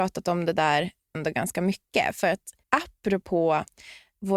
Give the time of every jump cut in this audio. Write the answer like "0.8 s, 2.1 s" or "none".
1.1 s, 2.6 s